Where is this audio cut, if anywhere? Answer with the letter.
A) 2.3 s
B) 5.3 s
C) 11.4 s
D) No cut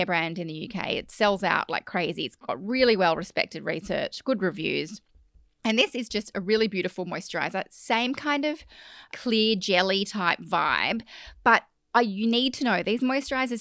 D